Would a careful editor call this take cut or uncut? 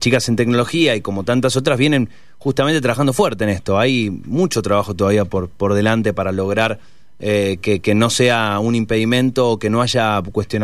uncut